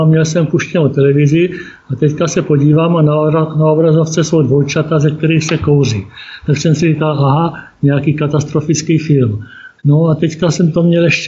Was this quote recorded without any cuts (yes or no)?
no